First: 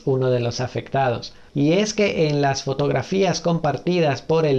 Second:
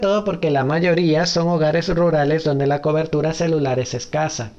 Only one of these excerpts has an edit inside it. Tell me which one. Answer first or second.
first